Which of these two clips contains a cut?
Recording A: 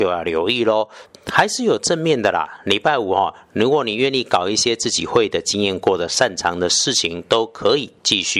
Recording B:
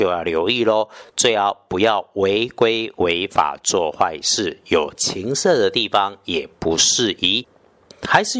A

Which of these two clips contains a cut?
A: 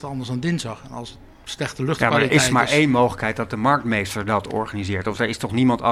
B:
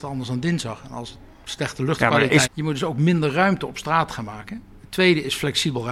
B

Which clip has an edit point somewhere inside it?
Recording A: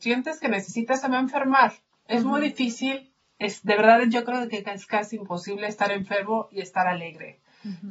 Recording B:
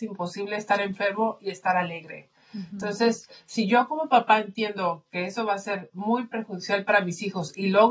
A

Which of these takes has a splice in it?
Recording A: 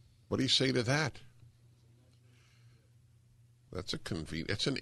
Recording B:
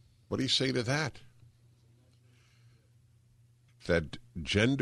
B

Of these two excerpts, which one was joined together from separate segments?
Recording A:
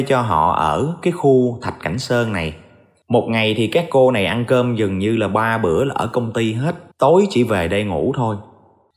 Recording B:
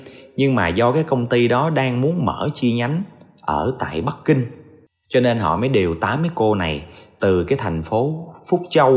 A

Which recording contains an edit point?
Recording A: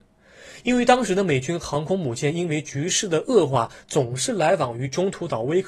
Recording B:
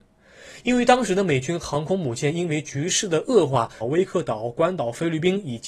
B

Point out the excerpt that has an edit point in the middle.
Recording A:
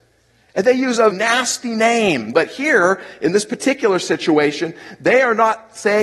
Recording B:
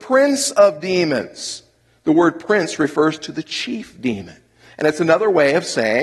A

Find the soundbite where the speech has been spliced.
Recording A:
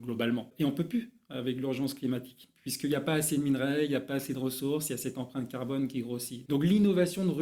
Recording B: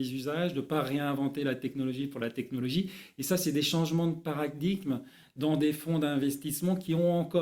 A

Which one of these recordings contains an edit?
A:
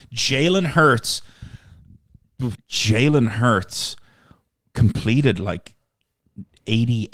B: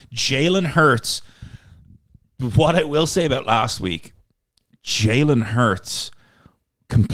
A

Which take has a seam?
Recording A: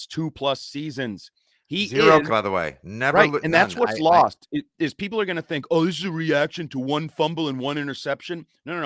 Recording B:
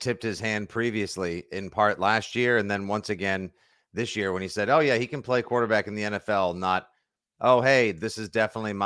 A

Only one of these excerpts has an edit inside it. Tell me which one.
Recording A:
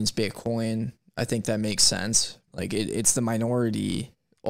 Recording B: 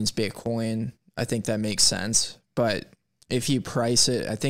A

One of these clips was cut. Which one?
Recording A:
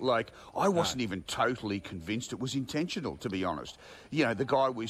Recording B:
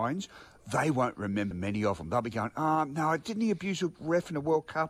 B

